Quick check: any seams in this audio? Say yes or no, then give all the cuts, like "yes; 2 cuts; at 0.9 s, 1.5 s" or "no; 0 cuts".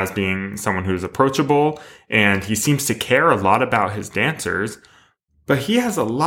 no; 0 cuts